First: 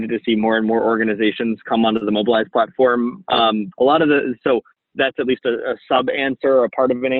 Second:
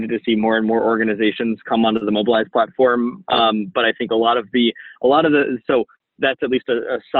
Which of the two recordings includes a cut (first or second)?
first